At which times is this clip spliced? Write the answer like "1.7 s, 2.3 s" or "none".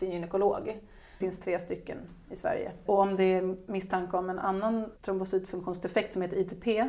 1.2 s, 2.9 s, 5.0 s